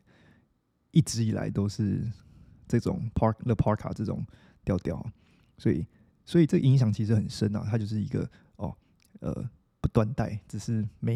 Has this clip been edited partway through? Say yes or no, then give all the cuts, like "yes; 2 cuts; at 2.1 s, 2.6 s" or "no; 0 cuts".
no; 0 cuts